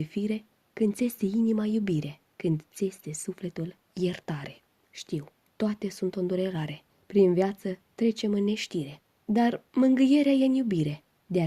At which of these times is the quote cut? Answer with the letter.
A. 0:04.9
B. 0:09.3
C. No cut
C